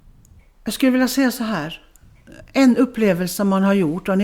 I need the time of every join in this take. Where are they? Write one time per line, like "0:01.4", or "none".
none